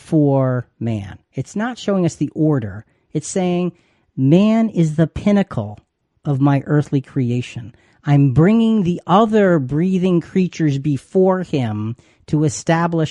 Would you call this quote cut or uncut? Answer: uncut